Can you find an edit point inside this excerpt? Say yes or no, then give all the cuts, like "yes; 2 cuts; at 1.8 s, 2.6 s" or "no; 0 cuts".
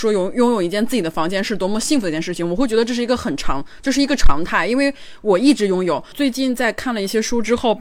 no; 0 cuts